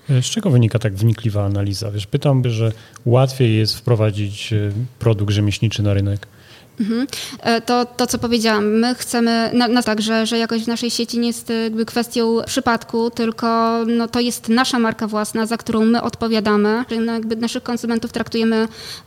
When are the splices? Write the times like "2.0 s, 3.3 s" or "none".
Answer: 2.4 s, 6.7 s, 9.8 s